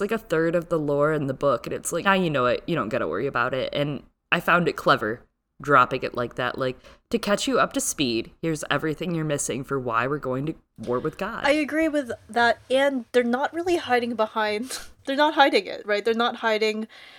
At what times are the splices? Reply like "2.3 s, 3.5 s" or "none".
2.0 s